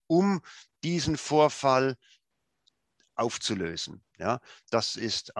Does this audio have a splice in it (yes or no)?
no